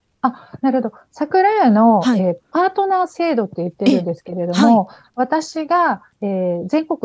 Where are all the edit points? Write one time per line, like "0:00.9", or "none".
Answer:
none